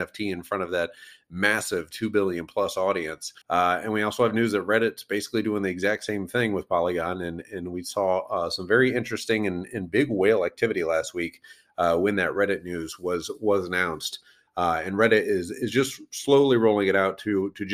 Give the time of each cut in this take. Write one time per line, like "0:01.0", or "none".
0:03.4